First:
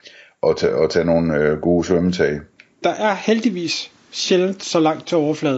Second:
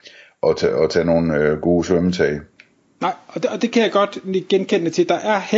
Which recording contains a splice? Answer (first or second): first